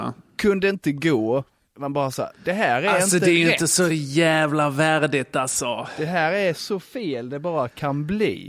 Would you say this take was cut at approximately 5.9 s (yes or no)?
no